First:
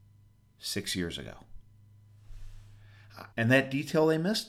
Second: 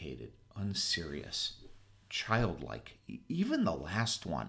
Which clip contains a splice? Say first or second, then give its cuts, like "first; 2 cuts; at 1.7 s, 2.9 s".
first; 1 cut; at 3.3 s